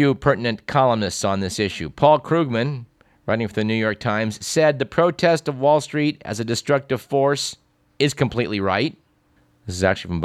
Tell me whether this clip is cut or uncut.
uncut